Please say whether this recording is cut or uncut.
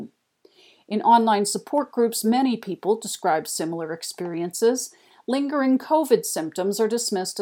uncut